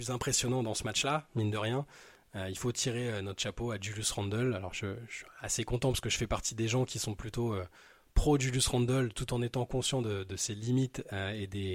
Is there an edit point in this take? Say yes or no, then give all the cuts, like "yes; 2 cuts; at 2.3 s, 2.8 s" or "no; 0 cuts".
no; 0 cuts